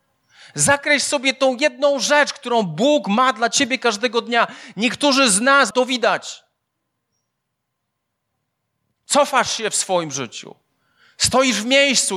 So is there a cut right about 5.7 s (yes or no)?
yes